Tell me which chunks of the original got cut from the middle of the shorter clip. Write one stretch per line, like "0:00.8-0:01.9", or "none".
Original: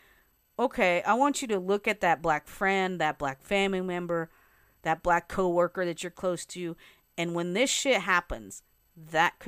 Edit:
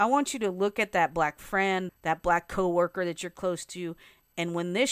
0:03.0-0:04.7